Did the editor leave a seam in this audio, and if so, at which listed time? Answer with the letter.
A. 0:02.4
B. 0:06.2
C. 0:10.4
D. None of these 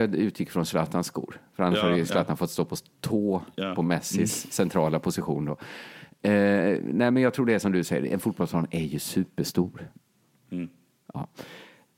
D